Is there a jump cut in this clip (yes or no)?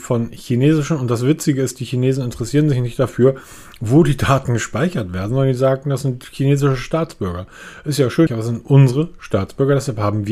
yes